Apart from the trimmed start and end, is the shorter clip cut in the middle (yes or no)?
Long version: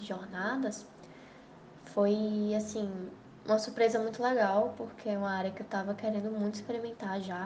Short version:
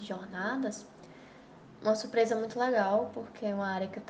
yes